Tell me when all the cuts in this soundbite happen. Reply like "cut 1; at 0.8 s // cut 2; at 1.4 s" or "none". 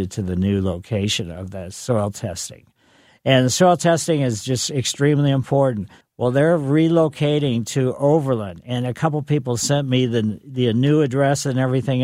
cut 1; at 6.0 s

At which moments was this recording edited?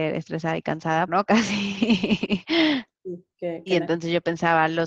cut 1; at 1.1 s // cut 2; at 2.9 s

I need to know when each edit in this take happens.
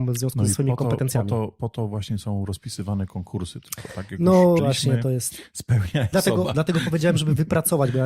cut 1; at 4.6 s // cut 2; at 6.1 s

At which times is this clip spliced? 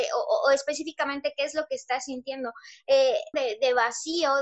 cut 1; at 3.3 s

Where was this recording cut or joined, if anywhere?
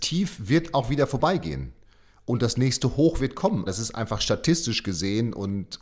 cut 1; at 3.7 s

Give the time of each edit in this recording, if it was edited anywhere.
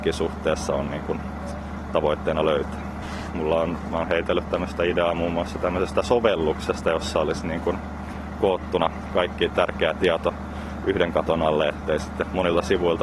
cut 1; at 3.3 s

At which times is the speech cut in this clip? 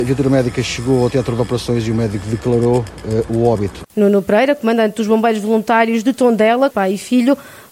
cut 1; at 3.9 s // cut 2; at 6.7 s

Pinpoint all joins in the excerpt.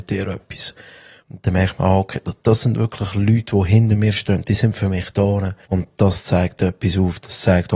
cut 1; at 1.2 s // cut 2; at 5.7 s

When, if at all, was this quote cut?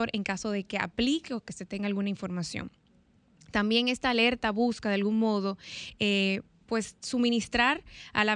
none

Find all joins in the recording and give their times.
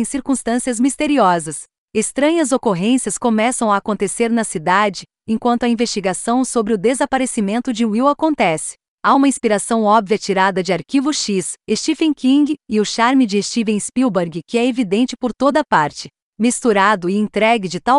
cut 1; at 11.6 s

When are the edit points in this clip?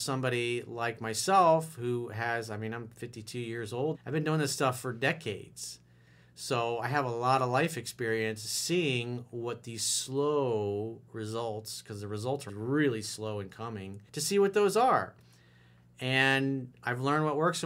cut 1; at 3.9 s // cut 2; at 12.5 s // cut 3; at 14.1 s

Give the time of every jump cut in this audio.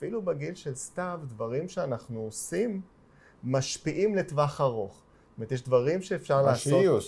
none

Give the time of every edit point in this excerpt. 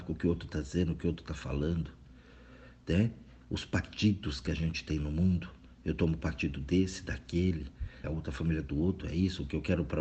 cut 1; at 8.0 s

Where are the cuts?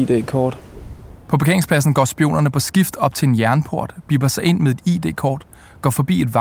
cut 1; at 1.2 s

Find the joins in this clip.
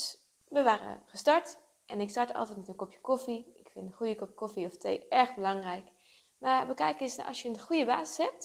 cut 1; at 6.2 s

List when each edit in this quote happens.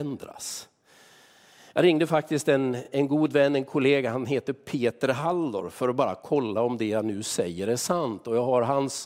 none

